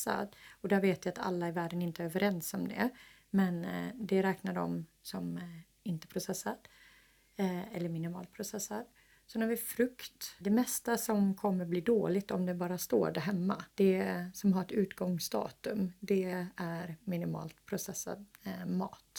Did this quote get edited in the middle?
yes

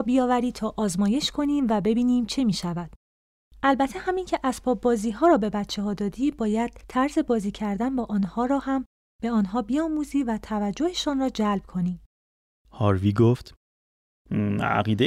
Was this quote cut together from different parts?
yes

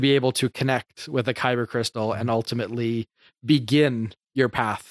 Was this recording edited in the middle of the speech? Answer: no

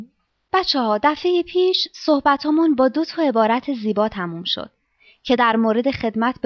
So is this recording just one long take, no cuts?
yes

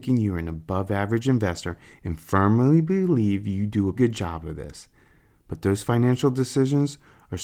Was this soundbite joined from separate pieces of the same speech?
yes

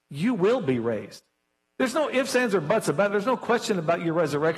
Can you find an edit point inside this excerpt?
no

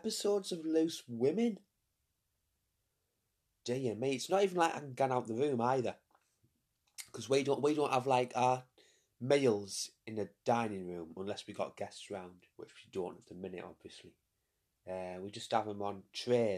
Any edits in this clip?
yes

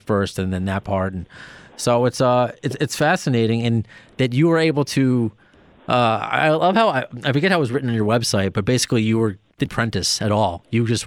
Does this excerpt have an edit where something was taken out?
yes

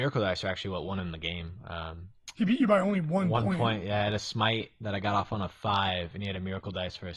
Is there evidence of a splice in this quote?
no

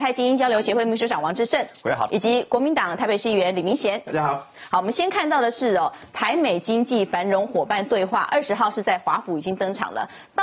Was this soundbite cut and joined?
yes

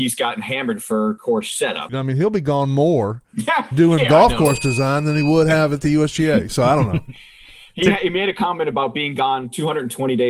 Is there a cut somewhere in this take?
yes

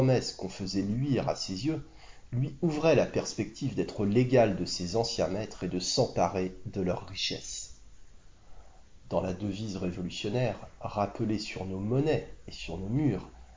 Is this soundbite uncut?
yes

